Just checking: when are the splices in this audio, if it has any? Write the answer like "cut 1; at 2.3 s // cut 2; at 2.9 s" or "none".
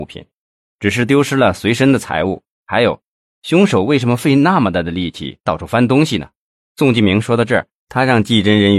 cut 1; at 2.5 s // cut 2; at 6.7 s